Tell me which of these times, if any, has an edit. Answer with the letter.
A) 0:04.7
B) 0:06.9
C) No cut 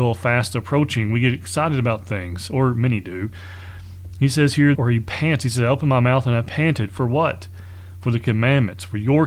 A